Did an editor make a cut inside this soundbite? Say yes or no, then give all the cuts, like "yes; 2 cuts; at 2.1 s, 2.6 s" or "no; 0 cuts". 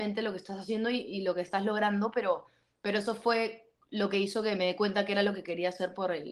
no; 0 cuts